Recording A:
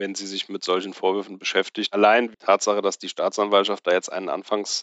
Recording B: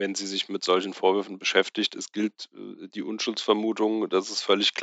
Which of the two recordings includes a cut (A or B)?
A